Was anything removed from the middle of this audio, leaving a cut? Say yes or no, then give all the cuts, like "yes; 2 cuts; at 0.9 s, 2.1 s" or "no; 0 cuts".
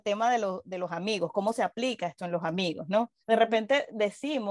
yes; 1 cut; at 3.2 s